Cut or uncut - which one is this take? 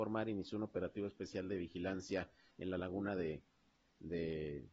uncut